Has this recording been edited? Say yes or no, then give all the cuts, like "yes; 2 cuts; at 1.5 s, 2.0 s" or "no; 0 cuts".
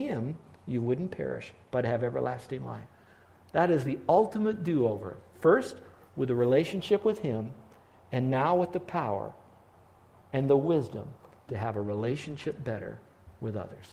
no; 0 cuts